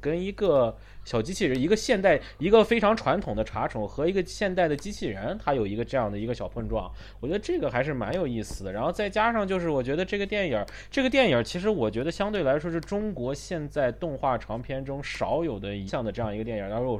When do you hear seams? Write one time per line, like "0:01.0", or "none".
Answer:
0:15.9